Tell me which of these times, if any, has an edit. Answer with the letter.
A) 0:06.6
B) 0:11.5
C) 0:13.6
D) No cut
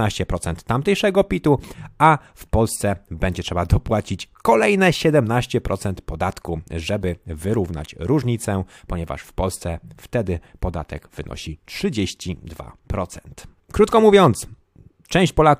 D